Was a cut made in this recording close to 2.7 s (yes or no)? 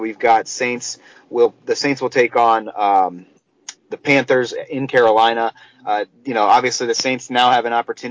no